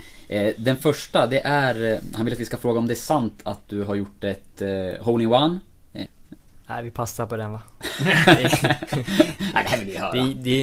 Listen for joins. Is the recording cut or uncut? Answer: cut